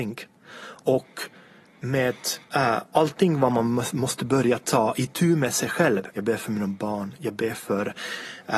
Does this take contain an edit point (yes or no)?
yes